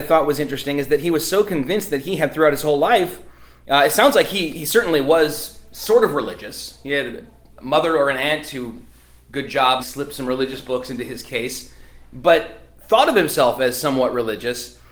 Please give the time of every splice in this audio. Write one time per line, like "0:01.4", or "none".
0:09.8